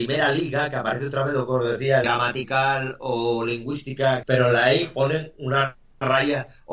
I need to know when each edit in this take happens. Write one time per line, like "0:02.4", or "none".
0:02.0
0:04.2